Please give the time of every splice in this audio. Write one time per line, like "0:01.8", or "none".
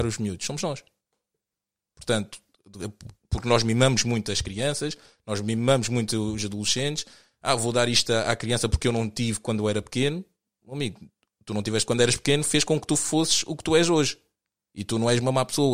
none